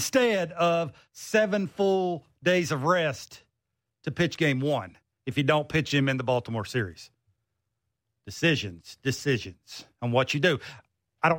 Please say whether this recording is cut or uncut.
uncut